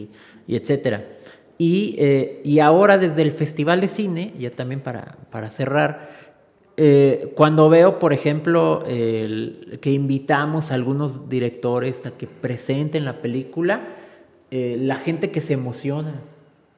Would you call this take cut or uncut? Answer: uncut